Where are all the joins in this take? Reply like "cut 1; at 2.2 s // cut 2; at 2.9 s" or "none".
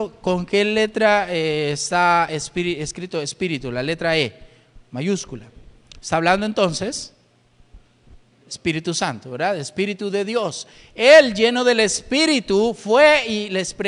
none